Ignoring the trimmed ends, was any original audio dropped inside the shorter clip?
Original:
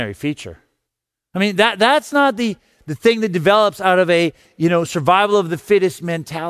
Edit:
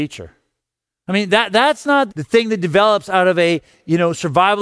yes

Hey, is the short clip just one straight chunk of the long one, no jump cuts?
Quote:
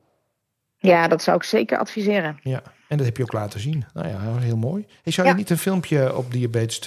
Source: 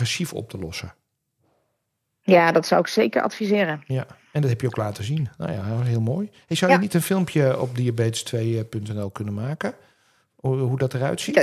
yes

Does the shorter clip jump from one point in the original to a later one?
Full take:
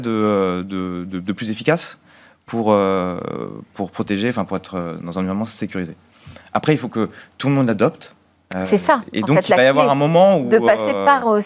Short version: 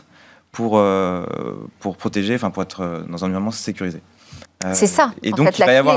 yes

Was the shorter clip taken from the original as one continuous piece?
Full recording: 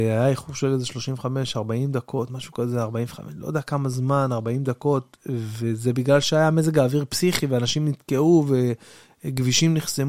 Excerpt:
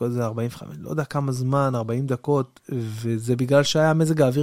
yes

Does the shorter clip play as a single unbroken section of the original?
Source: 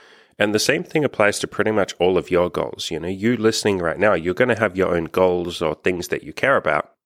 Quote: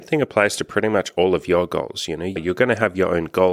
no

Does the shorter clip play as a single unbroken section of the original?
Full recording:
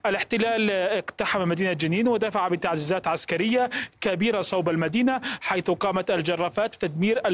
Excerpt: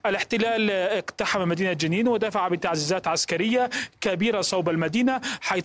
yes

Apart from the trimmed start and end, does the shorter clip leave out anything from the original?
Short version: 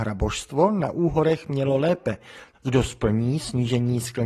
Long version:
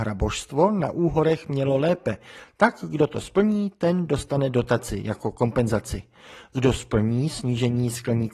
yes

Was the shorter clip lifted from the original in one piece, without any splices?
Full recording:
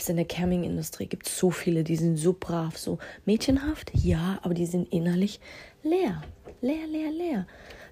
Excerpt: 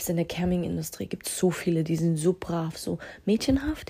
yes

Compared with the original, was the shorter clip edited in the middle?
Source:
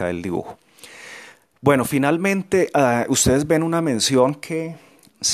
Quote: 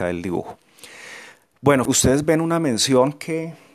yes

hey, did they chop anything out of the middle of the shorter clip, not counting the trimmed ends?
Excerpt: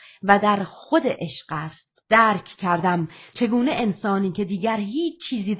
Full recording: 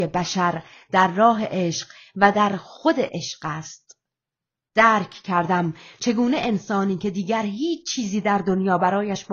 yes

